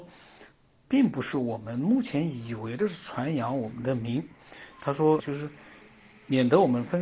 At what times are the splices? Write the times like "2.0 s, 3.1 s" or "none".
5.2 s